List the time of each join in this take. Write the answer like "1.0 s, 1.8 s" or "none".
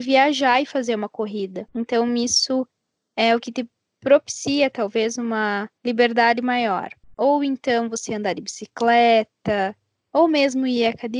5.8 s